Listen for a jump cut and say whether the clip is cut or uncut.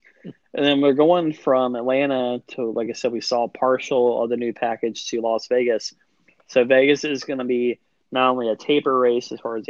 uncut